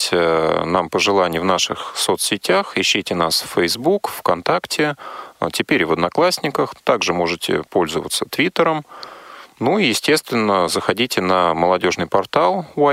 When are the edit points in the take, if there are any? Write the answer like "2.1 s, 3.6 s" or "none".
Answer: none